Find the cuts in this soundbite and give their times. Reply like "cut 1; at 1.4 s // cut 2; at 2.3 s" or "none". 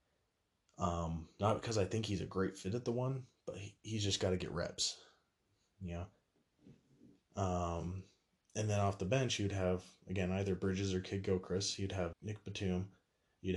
cut 1; at 12.1 s